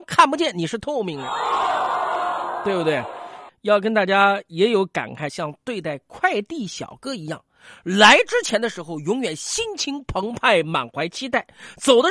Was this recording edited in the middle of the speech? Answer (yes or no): yes